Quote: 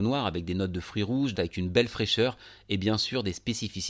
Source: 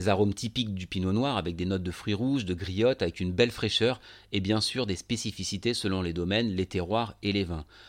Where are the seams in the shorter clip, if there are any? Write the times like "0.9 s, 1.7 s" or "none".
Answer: 1.3 s

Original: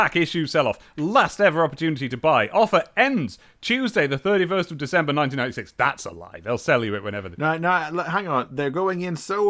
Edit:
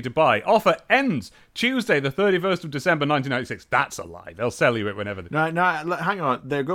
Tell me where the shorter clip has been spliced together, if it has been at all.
none

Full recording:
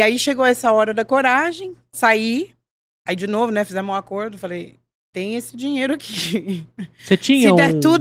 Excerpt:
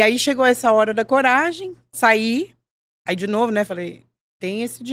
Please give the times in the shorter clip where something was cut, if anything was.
3.7 s

